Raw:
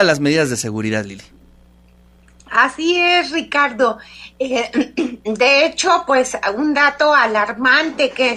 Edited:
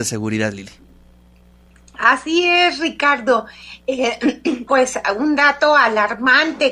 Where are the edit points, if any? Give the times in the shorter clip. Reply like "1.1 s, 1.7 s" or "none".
4.7 s